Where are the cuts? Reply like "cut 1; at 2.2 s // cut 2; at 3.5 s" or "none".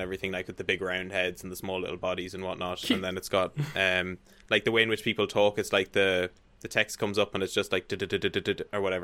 none